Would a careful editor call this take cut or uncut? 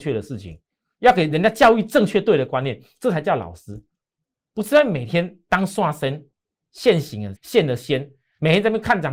cut